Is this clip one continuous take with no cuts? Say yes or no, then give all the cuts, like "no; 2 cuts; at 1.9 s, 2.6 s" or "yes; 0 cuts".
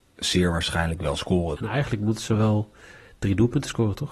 no; 1 cut; at 1.6 s